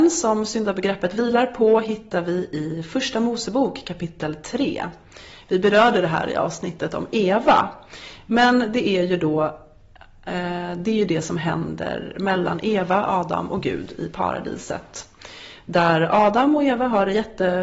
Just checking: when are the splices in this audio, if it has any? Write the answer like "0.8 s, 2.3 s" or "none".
none